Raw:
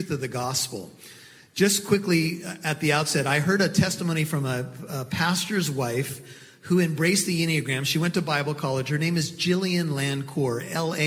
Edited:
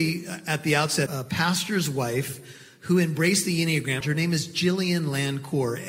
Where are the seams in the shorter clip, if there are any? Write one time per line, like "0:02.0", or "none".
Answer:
0:01.1
0:04.0